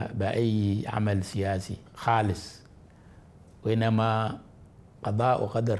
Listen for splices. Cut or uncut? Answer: cut